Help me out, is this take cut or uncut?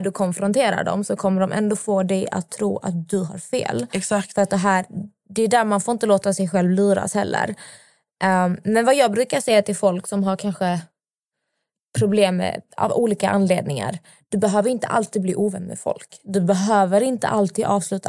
uncut